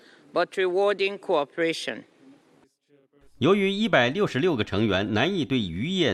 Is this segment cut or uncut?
uncut